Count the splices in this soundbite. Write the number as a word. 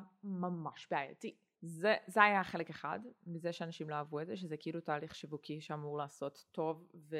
one